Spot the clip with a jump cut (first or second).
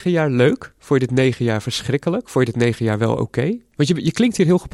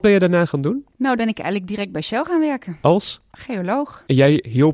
second